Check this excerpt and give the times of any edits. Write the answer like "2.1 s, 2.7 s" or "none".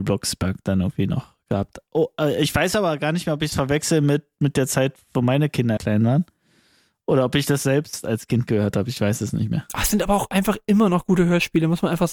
5.8 s